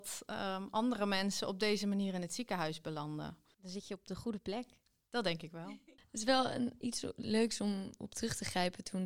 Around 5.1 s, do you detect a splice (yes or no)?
no